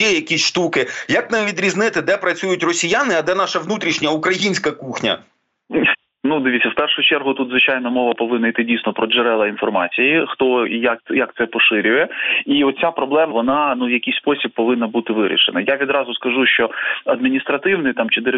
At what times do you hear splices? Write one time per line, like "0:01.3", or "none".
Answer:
0:11.0
0:13.3